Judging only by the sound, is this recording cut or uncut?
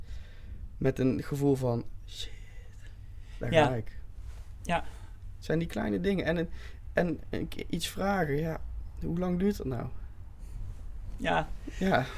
uncut